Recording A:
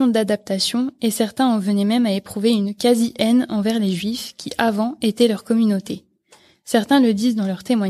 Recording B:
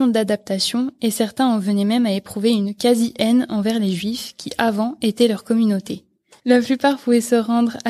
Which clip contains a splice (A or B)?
B